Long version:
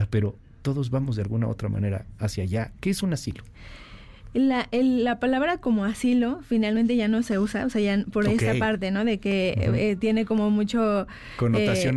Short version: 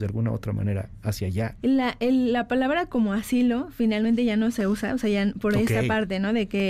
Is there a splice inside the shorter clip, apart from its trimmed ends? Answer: yes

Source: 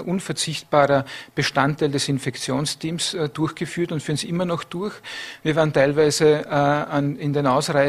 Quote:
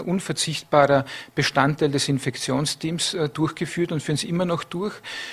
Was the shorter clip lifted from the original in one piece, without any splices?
yes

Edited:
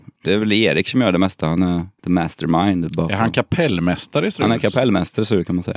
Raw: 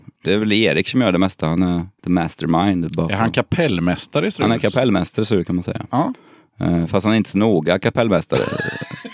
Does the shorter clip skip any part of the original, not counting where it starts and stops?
no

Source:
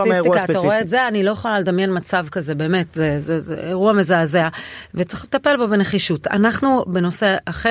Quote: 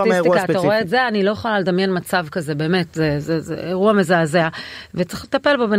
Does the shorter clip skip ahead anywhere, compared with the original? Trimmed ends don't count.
no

